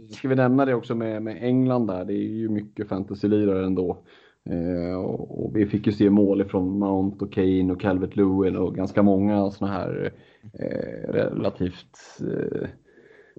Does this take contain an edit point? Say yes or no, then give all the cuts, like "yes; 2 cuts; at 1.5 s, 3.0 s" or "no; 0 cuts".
no; 0 cuts